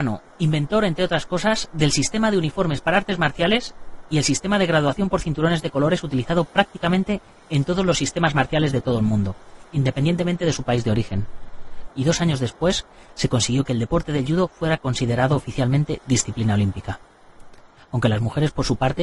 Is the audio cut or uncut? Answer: cut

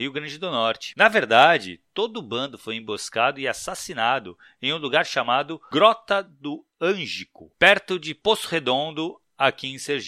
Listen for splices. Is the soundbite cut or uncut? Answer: uncut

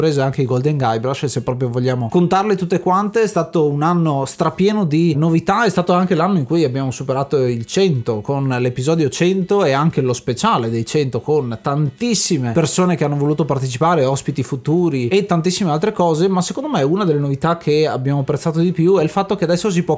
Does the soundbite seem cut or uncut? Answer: uncut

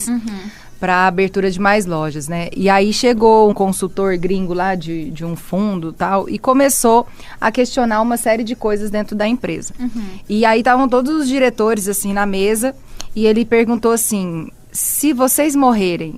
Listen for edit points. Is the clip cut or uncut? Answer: cut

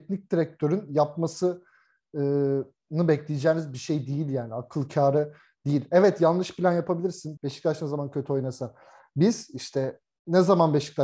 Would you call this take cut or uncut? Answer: cut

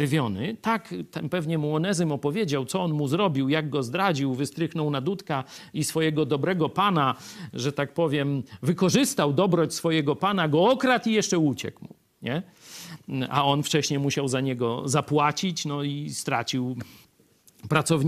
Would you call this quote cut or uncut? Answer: uncut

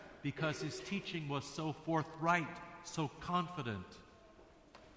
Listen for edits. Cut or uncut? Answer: uncut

